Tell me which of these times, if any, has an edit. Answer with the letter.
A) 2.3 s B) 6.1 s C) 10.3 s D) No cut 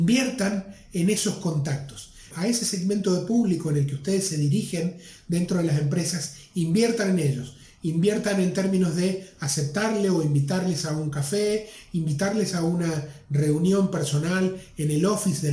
A